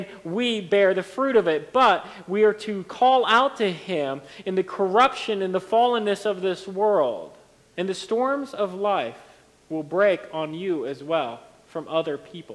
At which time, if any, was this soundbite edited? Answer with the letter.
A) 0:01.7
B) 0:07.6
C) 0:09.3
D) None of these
B